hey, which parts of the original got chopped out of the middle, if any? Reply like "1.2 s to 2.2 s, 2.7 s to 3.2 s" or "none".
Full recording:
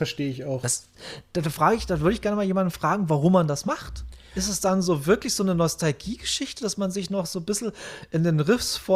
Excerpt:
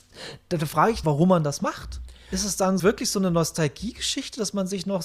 1.9 s to 3.1 s, 4.8 s to 5.0 s